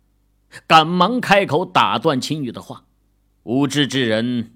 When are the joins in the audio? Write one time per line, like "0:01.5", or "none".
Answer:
0:03.4